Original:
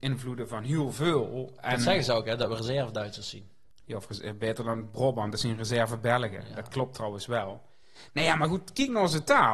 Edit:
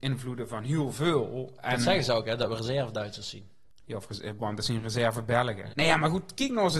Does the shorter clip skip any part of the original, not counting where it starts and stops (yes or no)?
yes